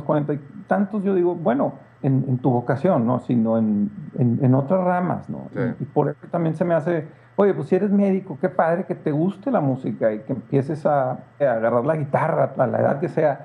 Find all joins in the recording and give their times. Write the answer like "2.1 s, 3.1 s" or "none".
2.0 s, 11.4 s, 12.5 s